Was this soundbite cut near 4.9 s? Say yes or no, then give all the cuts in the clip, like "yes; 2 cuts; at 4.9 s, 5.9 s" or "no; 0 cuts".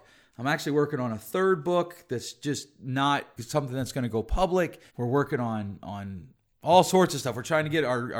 yes; 2 cuts; at 3.4 s, 4.9 s